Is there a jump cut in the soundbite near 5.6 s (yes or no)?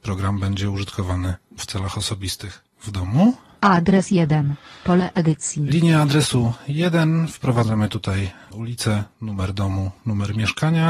no